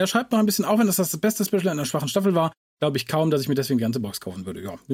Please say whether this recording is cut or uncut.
uncut